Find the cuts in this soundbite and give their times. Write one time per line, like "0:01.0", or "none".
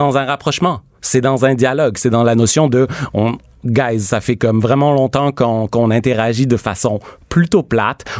none